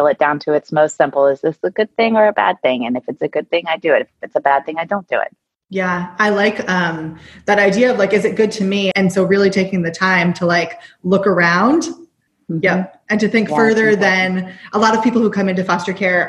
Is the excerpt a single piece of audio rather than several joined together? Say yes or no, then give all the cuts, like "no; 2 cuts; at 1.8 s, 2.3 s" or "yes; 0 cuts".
no; 1 cut; at 8.9 s